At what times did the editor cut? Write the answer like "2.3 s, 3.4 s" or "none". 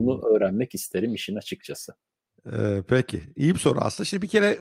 none